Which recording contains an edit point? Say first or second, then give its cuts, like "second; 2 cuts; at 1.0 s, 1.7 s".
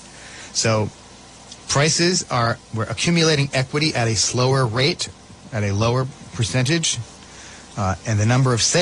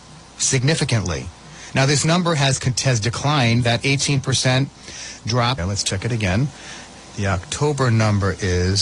second; 2 cuts; at 5.6 s, 7.1 s